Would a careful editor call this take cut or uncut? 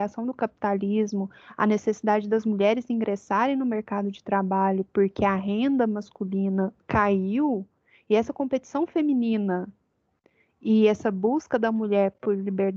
uncut